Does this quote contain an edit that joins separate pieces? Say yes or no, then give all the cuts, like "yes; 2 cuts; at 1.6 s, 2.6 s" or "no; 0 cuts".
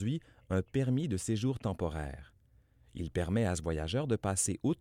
no; 0 cuts